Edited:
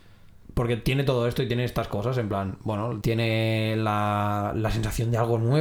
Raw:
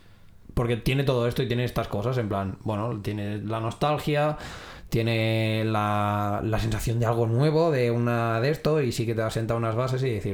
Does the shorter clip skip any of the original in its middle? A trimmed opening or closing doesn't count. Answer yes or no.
yes